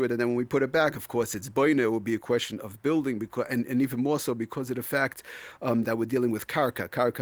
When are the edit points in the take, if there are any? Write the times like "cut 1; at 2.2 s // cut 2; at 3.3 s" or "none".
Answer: none